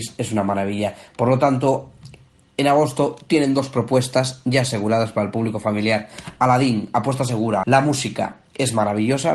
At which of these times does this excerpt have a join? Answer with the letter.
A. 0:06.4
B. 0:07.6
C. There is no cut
B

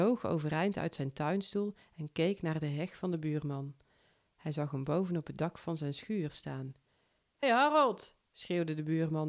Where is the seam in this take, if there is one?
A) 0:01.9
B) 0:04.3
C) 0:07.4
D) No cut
C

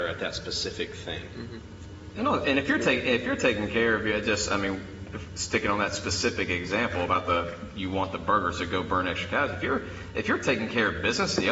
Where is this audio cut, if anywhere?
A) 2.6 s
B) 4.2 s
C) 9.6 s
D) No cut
D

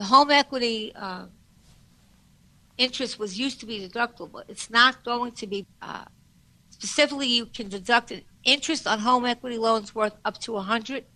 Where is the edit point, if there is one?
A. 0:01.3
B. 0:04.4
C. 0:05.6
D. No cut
C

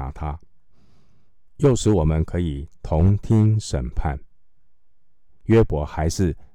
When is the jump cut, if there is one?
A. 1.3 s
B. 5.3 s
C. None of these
B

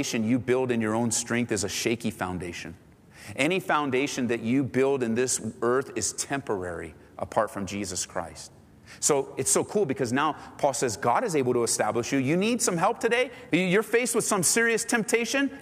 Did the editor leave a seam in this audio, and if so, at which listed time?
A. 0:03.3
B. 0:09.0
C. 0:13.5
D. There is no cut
C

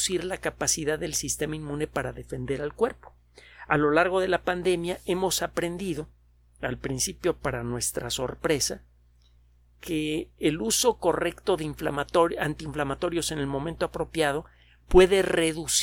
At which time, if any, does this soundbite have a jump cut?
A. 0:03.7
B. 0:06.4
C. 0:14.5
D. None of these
D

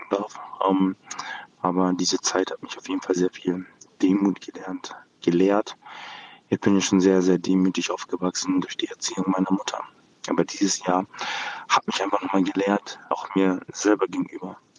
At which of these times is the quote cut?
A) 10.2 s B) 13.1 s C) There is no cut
B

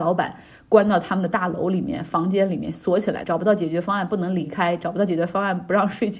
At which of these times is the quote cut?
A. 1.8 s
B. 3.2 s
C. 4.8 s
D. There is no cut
B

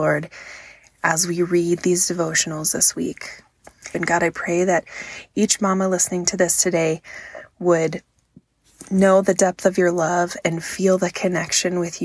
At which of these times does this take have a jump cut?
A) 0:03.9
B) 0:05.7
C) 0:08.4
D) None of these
A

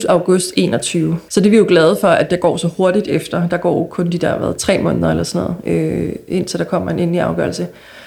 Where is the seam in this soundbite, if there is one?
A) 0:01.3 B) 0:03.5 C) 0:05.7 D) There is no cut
A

